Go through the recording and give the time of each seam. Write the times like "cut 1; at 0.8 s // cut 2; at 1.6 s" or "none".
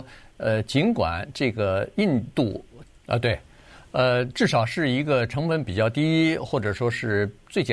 cut 1; at 3.0 s